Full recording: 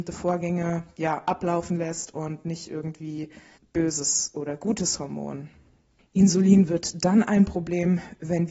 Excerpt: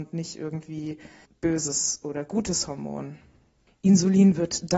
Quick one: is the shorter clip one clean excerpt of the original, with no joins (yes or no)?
yes